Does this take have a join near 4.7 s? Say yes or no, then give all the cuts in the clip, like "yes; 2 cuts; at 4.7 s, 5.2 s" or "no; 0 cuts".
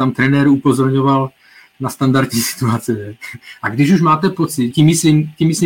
yes; 2 cuts; at 3.6 s, 4.7 s